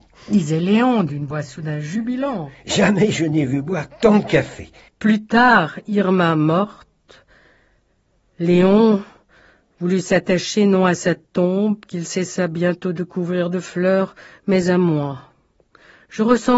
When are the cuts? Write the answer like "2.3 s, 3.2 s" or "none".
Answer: 4.9 s